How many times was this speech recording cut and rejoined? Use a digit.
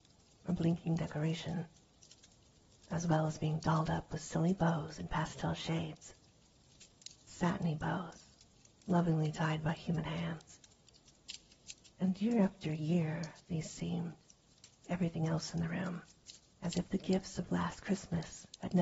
3